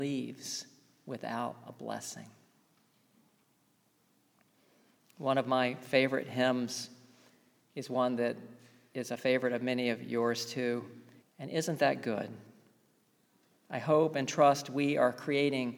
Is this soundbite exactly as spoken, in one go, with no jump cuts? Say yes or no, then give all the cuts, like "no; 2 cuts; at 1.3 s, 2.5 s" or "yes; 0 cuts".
no; 1 cut; at 11.2 s